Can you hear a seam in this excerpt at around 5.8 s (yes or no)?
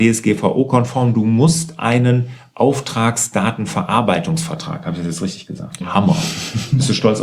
yes